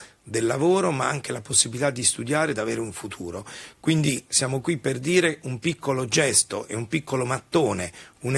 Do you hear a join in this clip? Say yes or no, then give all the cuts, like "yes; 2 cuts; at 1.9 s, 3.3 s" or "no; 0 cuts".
no; 0 cuts